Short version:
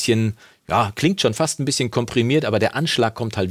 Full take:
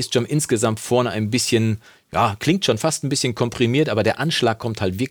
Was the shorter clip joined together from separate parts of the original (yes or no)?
no